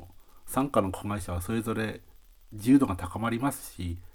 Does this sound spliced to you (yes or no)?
no